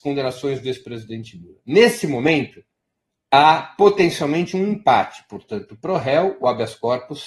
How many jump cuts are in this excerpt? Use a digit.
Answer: 0